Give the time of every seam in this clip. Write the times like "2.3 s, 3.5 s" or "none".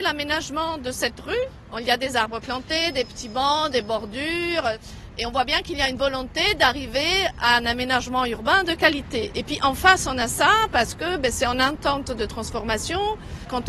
none